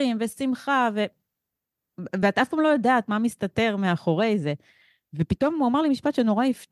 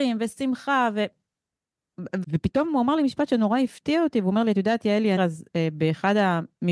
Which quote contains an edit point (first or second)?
second